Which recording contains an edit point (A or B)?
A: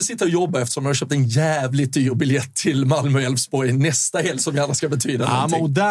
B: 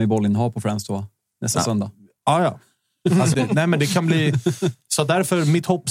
B